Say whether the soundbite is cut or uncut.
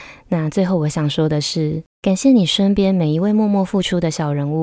cut